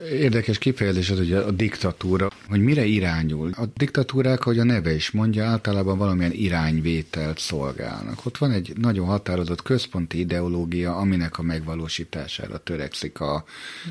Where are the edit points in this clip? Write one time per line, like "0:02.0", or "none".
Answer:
none

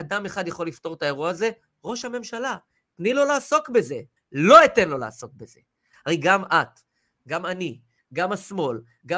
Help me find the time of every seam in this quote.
0:04.2
0:05.9
0:08.0

